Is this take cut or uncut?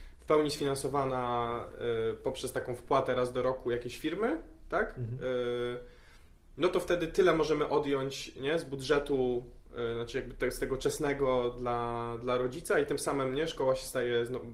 uncut